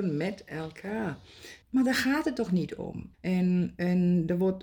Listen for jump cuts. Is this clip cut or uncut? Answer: cut